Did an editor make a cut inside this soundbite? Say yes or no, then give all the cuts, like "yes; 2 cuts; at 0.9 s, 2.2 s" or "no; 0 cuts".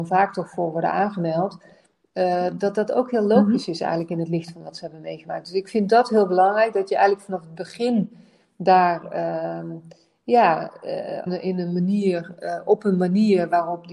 yes; 1 cut; at 11.3 s